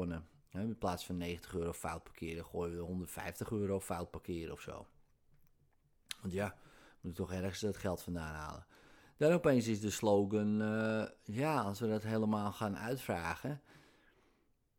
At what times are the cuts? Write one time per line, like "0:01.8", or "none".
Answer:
none